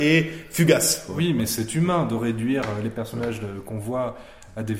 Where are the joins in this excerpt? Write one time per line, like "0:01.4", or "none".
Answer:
none